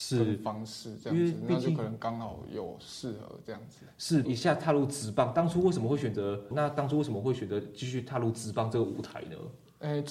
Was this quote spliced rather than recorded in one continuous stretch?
yes; 2 cuts; at 4.2 s, 6.5 s

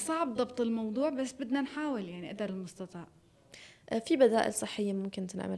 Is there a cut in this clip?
no; 0 cuts

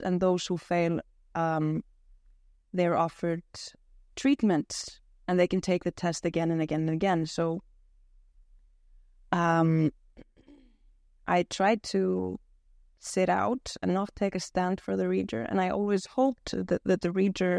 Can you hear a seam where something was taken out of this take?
no; 0 cuts

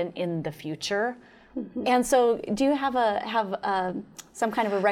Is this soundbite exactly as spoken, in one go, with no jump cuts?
no; 1 cut; at 1.8 s

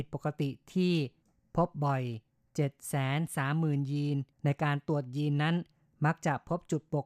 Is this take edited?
yes; 1 cut; at 4.3 s

